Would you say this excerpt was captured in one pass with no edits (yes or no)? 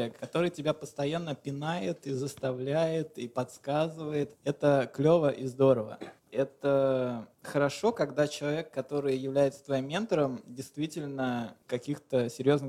yes